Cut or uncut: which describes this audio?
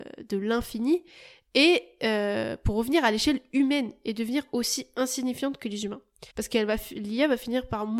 cut